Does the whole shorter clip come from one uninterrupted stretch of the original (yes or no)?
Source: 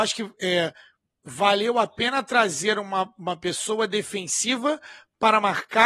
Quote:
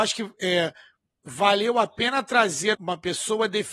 no